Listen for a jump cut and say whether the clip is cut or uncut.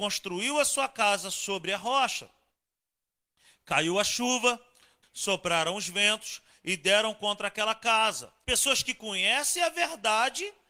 cut